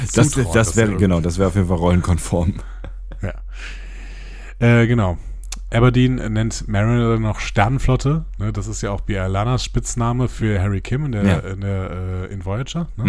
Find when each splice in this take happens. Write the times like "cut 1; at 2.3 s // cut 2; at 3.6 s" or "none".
none